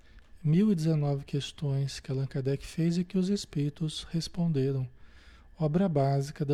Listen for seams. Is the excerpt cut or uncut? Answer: uncut